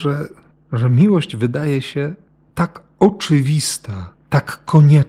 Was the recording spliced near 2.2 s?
no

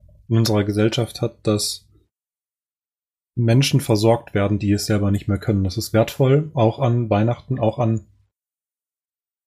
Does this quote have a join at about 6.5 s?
no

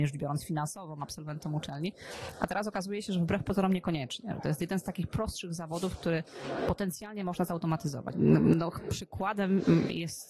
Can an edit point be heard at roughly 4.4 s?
no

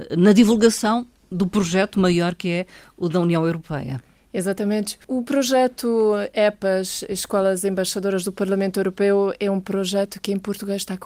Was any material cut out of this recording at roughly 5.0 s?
yes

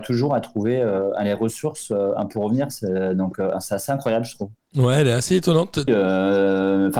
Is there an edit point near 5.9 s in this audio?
yes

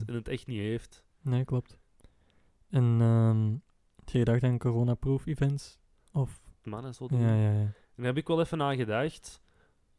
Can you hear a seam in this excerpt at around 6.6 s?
yes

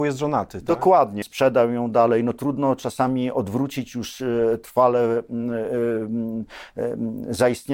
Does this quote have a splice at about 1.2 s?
yes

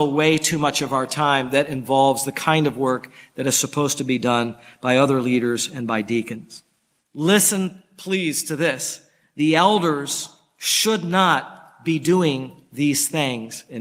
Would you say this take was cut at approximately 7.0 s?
yes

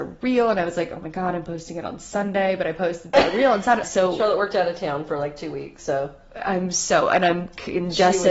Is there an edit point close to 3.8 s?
yes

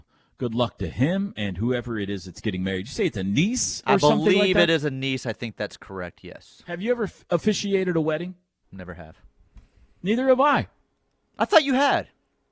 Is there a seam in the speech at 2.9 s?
no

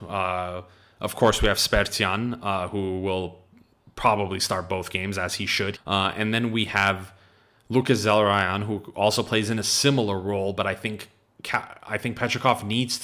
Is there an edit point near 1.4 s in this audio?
no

